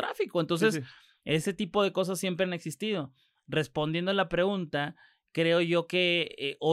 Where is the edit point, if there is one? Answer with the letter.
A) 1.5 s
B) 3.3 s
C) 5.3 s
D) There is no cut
D